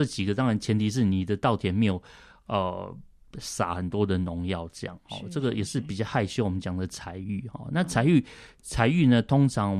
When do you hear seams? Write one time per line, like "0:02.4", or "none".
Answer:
none